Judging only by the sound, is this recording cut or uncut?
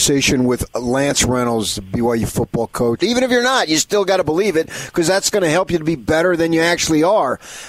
cut